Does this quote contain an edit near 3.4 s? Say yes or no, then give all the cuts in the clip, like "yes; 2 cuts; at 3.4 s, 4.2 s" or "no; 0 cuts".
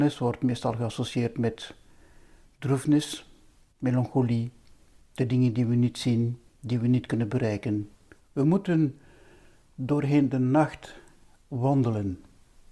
no; 2 cuts; at 6.5 s, 8.2 s